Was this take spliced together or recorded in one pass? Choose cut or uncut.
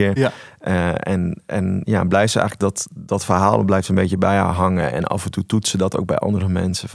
uncut